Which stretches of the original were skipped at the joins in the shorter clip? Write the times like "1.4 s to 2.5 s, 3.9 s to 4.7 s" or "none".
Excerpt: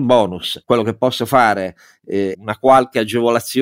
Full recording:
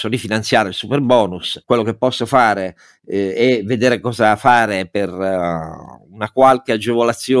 3.3 s to 6.1 s